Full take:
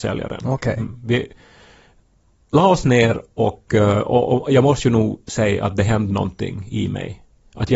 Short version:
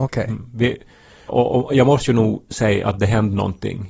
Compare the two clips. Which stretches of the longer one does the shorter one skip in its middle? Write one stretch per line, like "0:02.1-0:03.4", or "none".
0:01.8-0:04.0

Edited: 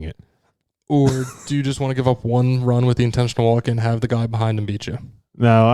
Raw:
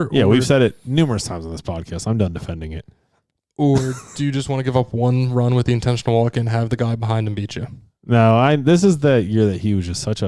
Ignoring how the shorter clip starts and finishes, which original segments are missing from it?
none

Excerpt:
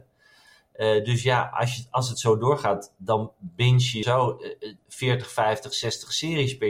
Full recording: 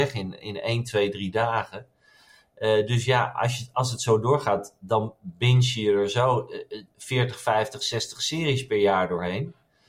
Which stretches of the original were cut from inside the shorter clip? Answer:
0:05.8-0:06.1

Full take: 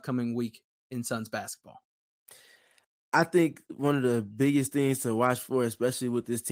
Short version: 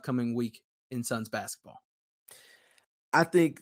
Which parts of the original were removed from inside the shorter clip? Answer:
none

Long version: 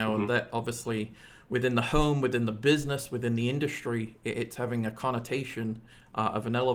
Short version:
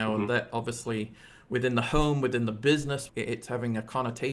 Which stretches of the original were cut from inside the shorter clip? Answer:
0:03.1-0:04.2

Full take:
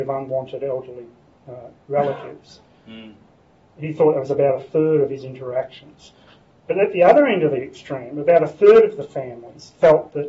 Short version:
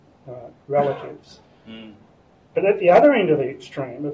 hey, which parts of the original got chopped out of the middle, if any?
0:03.6-0:06.6

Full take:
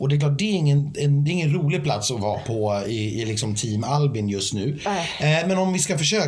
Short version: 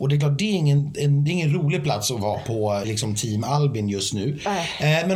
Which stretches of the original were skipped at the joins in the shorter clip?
0:02.8-0:03.2

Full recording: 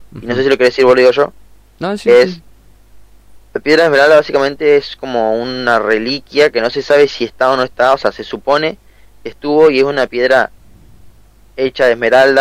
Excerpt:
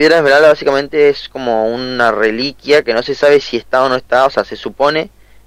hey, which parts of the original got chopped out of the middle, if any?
none

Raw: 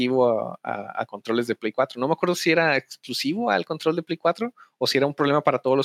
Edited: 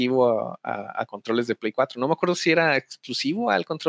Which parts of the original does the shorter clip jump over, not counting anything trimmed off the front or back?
none

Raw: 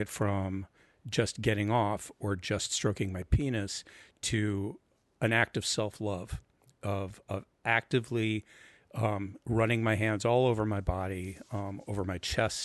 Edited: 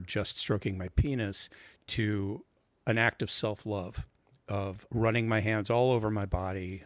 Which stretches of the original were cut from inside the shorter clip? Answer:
0:07.2-0:09.4

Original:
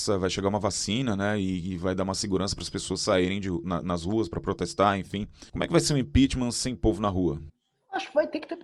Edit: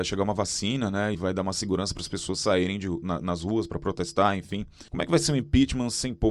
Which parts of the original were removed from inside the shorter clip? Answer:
0:01.4-0:01.8

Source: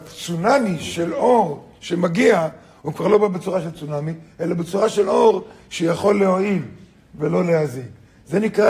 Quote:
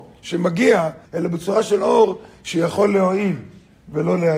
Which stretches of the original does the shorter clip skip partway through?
0:02.6-0:04.3

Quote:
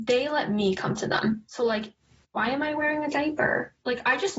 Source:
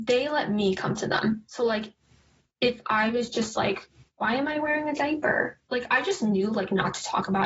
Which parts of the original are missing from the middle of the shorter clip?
0:02.2-0:04.1

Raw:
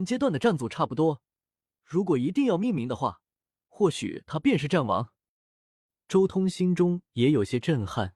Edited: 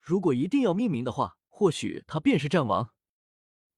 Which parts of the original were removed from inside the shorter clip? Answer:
0:03.3-0:03.6

